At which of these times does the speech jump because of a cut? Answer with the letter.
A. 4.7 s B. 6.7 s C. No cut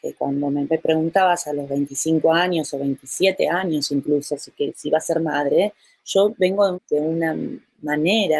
B